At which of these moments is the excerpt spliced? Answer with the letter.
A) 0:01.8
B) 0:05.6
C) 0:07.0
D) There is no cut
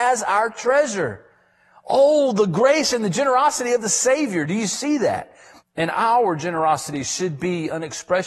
B